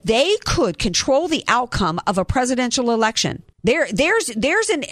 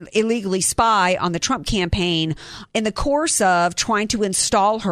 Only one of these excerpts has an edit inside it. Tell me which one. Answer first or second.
first